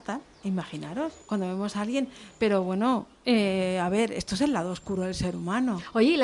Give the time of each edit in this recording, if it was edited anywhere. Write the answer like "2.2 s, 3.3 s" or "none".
1.2 s